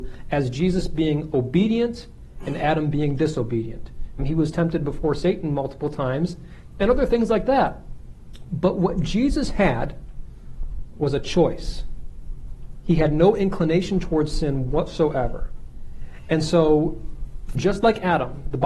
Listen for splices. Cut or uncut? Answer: cut